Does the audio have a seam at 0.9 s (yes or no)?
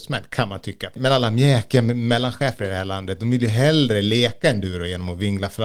yes